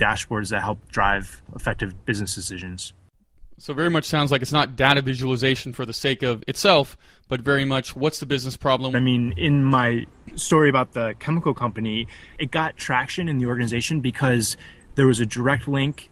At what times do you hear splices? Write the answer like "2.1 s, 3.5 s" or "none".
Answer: 8.9 s